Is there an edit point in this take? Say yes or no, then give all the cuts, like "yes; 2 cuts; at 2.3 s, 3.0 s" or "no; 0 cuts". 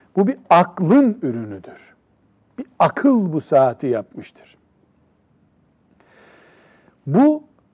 no; 0 cuts